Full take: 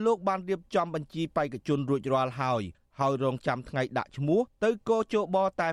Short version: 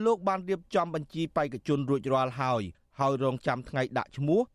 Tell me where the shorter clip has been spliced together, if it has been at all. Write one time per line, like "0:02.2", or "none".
none